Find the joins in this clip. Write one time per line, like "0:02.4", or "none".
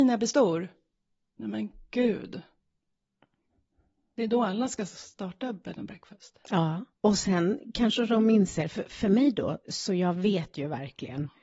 0:06.9
0:09.7